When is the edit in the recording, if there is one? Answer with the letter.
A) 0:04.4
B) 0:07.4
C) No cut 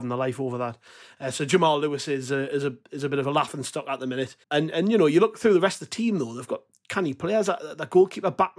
A